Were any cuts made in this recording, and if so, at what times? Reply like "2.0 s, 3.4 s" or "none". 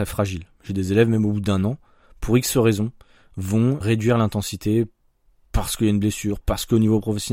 3.8 s, 6.4 s